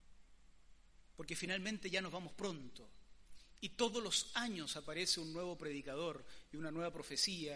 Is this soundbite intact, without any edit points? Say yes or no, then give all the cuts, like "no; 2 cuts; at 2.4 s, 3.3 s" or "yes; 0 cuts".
yes; 0 cuts